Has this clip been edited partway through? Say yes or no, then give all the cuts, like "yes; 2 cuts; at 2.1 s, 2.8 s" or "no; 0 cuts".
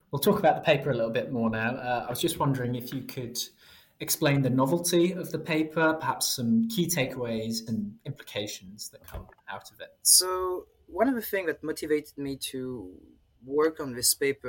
yes; 1 cut; at 7.7 s